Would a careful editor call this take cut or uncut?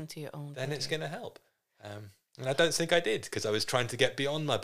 uncut